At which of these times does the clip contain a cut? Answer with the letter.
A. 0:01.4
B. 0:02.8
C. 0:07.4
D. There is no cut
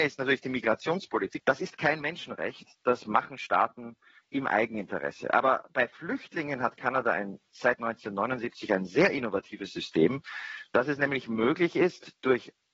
A